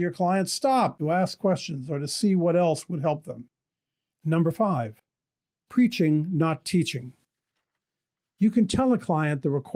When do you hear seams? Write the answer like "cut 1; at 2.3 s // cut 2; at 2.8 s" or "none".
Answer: cut 1; at 4.1 s